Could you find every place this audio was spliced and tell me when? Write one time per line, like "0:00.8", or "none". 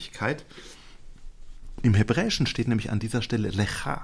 none

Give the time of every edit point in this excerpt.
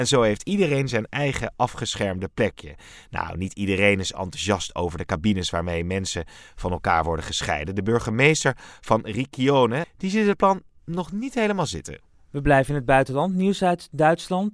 0:09.8

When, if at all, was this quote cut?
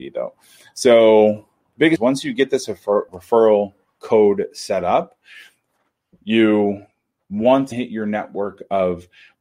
0:03.1
0:07.7

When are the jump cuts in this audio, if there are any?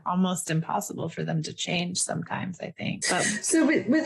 0:03.0

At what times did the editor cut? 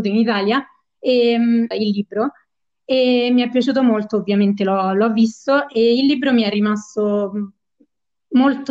0:01.7

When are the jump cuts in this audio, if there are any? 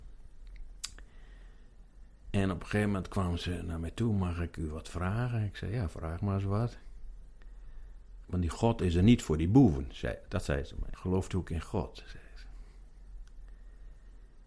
0:08.2
0:10.9

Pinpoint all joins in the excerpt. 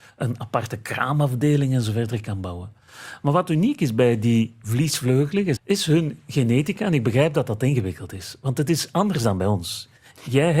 0:05.6

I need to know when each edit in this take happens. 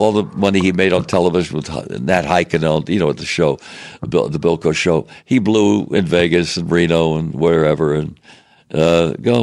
none

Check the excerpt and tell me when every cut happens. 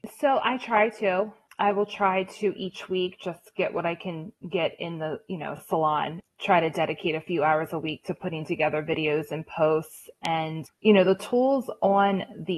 none

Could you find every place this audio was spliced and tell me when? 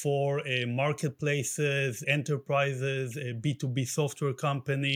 0:02.0

